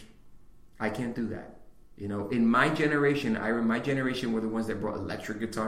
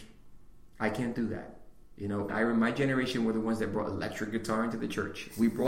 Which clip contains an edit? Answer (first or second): second